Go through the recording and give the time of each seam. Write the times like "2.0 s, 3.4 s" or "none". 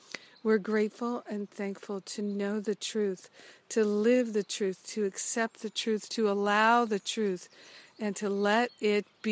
none